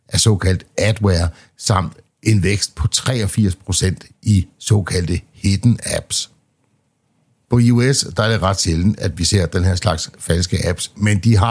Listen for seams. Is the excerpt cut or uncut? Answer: uncut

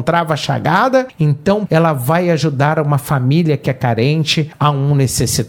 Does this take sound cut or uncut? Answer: cut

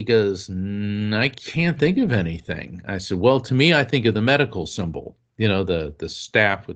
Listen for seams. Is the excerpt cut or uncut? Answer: uncut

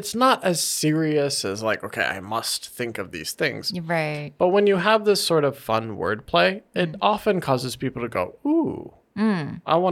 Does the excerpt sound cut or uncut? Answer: uncut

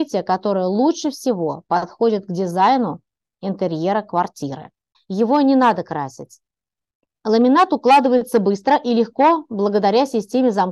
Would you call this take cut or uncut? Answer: cut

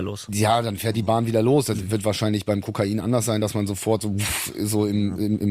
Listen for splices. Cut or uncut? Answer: uncut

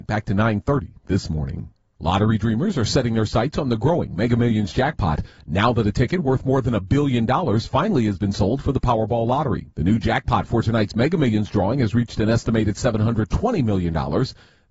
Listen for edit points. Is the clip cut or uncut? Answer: cut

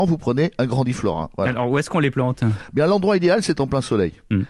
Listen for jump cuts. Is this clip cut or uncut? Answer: uncut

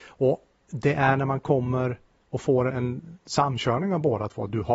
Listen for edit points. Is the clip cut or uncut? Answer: cut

